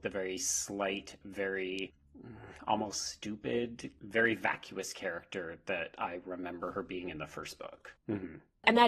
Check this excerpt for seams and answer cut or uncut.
cut